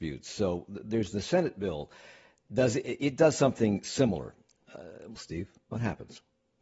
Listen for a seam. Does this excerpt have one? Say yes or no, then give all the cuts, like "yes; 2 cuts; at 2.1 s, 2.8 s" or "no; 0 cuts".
yes; 1 cut; at 5.2 s